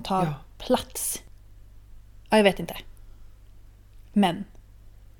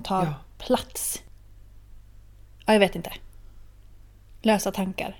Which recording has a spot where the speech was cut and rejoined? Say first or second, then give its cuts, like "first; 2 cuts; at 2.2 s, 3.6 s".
first; 2 cuts; at 2.2 s, 4.0 s